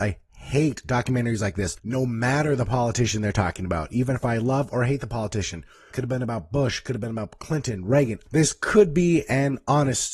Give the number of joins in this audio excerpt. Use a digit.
2